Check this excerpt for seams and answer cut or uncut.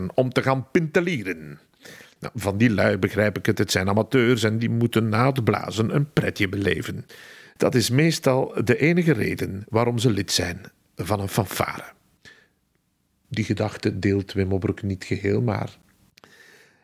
uncut